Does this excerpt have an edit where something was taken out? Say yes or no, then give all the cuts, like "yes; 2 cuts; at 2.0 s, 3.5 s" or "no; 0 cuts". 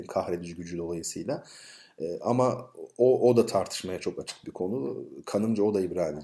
no; 0 cuts